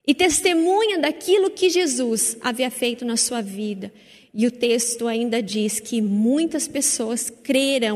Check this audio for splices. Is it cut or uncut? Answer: uncut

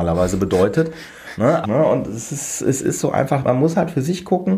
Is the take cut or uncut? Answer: cut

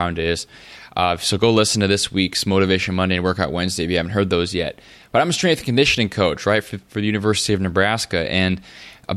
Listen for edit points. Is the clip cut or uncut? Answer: uncut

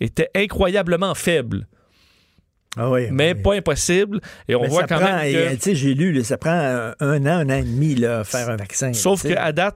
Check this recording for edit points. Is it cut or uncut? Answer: uncut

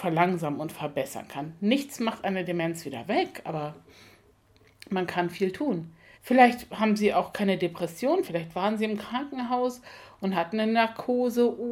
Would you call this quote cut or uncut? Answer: cut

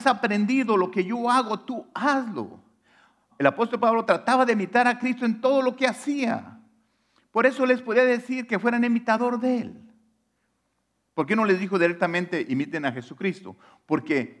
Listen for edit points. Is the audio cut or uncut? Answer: cut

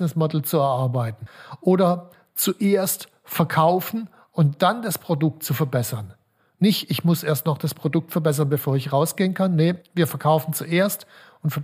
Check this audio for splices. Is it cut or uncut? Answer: uncut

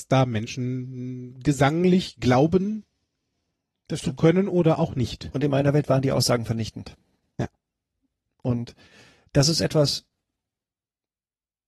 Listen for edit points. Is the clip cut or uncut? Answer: uncut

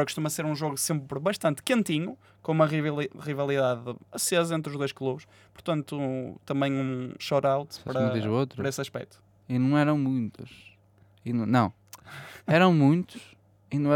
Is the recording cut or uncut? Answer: cut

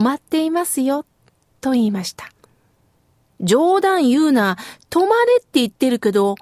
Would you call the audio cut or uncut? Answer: uncut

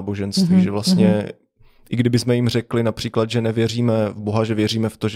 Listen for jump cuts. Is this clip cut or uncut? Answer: uncut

